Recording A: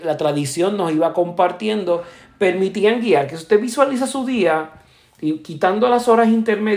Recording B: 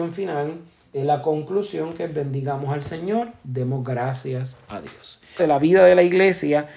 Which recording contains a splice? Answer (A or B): B